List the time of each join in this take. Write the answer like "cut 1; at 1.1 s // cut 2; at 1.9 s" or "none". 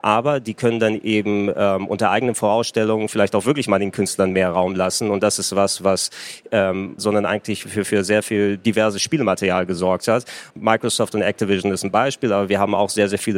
cut 1; at 7.0 s // cut 2; at 10.5 s